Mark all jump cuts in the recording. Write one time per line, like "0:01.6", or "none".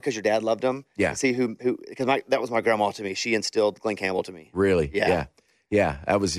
none